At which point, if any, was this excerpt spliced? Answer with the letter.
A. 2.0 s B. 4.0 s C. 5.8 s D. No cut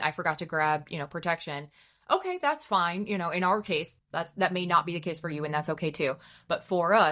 B